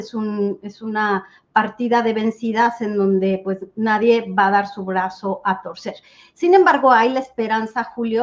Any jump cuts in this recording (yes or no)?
no